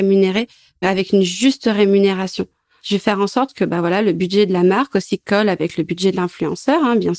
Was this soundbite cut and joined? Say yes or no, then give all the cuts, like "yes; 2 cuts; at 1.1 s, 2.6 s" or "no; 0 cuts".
no; 0 cuts